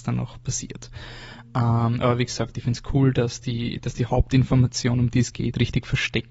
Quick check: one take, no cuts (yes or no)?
yes